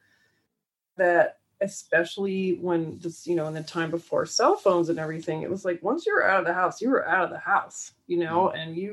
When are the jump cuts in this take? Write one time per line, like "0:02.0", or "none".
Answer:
none